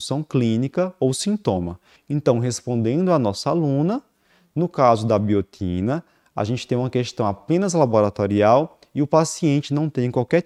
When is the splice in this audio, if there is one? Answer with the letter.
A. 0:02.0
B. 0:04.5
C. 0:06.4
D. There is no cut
A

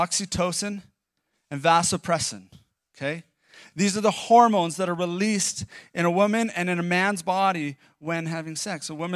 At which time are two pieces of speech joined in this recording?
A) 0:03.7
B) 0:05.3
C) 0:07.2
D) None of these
D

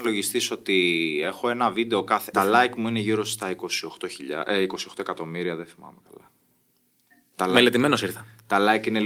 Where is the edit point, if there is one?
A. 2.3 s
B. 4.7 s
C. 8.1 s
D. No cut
A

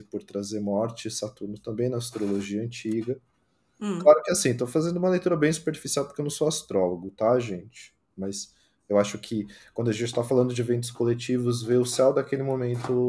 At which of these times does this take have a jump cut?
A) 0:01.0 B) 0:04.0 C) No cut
C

